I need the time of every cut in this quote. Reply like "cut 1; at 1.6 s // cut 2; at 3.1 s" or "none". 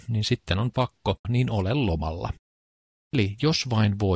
cut 1; at 1.2 s // cut 2; at 3.1 s